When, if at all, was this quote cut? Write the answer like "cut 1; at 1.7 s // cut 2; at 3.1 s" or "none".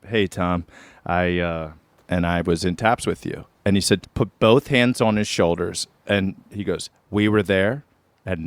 cut 1; at 2.0 s // cut 2; at 4.0 s